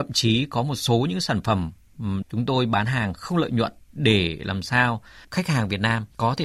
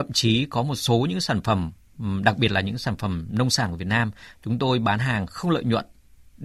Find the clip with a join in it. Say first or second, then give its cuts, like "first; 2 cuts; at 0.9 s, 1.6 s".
first; 2 cuts; at 2.2 s, 3.8 s